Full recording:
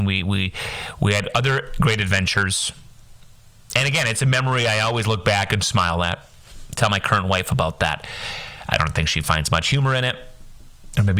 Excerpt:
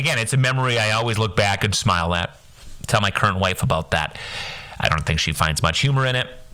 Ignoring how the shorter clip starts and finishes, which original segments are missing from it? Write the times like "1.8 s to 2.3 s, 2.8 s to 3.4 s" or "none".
none